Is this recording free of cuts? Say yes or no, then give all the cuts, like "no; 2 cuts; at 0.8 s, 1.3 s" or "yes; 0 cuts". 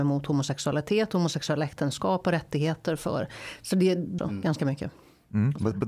no; 1 cut; at 4.2 s